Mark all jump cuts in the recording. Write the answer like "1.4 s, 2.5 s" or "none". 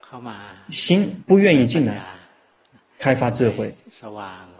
none